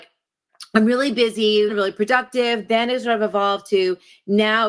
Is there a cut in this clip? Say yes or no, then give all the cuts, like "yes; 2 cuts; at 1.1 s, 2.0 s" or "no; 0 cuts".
yes; 1 cut; at 1.7 s